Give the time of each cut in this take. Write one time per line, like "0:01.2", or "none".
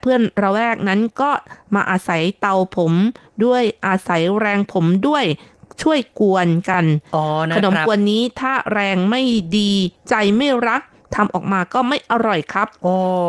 none